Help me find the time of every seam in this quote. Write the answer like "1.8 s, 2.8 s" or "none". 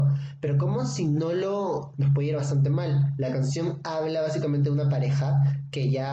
1.9 s